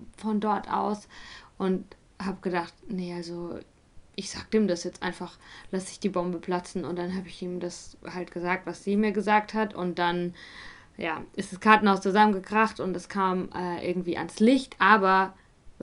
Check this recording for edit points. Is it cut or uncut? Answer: uncut